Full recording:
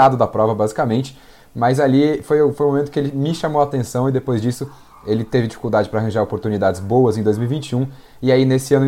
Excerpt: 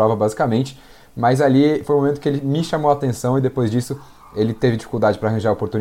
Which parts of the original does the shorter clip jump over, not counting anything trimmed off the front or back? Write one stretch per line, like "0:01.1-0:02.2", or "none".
0:02.2-0:02.6